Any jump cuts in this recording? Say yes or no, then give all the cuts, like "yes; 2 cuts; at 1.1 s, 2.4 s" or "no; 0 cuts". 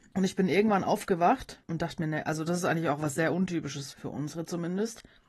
yes; 1 cut; at 3.9 s